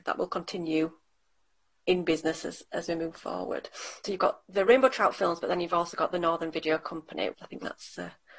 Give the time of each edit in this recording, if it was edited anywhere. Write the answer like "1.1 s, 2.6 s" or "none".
7.3 s